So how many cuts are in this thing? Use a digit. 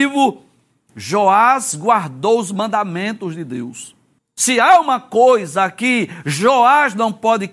1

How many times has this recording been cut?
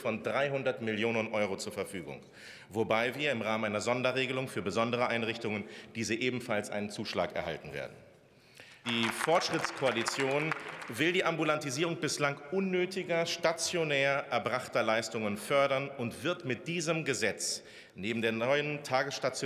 1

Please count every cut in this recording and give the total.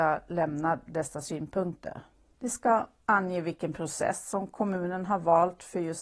1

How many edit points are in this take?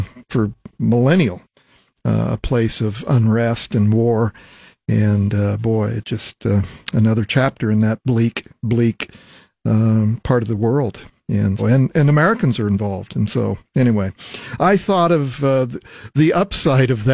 1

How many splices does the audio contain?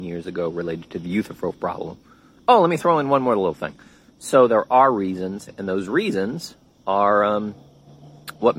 1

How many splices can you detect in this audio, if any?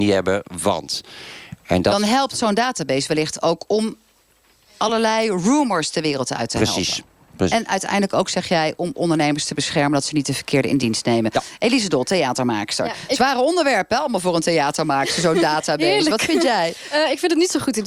0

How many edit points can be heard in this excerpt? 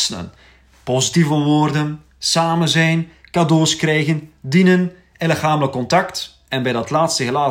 0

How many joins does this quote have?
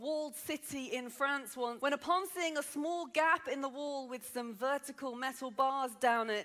1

